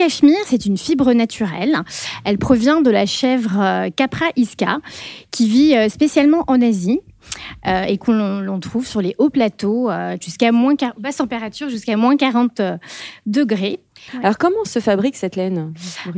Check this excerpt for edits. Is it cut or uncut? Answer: cut